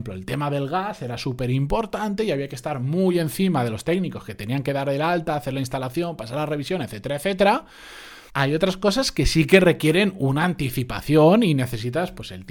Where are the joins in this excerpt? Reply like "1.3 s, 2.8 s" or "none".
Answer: 8.3 s